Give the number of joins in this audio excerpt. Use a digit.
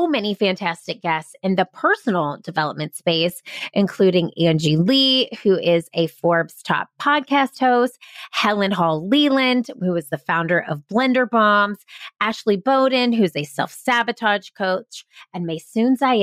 0